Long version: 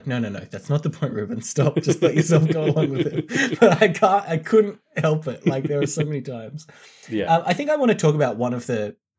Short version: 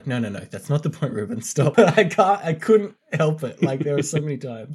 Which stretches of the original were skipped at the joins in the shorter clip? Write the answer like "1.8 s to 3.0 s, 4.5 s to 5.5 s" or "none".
1.7 s to 3.6 s